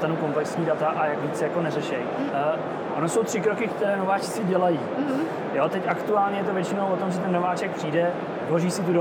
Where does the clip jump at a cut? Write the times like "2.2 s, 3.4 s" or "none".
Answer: 1.2 s, 2.3 s, 3.7 s